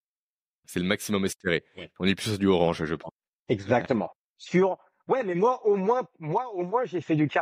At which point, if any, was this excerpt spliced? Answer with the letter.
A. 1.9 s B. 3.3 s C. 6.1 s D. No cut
D